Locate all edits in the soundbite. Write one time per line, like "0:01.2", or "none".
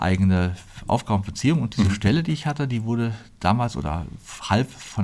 none

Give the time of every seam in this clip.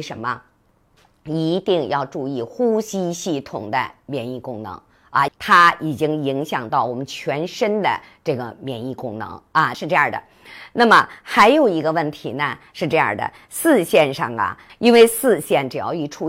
0:05.3
0:09.7
0:14.7

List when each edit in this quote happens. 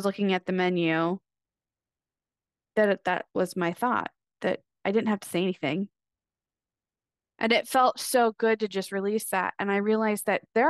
0:07.3

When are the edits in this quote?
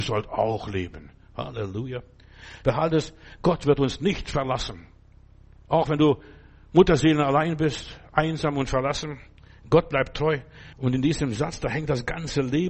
0:02.6
0:10.7

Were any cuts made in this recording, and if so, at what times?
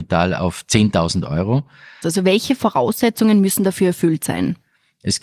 0:02.0

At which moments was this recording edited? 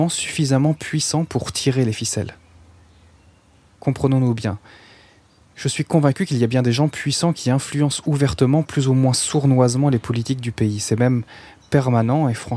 none

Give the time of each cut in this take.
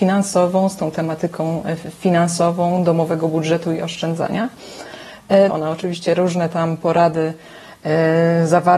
0:05.5

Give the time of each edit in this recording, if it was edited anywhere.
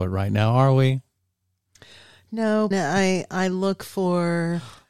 0:02.7

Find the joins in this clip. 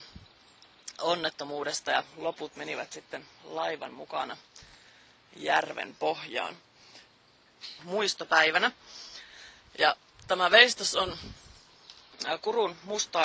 0:07.8

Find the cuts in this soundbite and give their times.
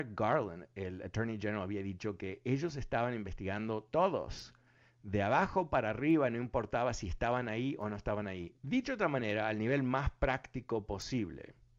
0:08.6

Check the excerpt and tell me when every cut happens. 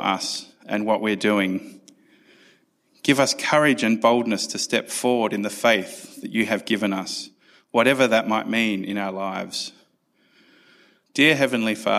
0:11.1

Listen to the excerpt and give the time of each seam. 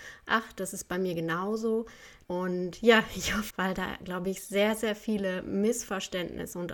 0:02.2
0:03.5

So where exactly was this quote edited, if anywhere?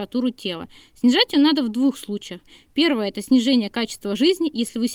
none

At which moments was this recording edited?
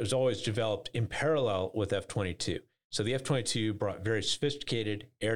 none

